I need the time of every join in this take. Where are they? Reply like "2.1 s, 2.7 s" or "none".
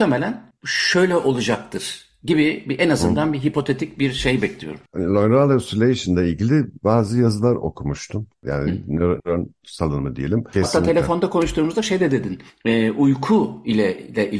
9.2 s, 10.5 s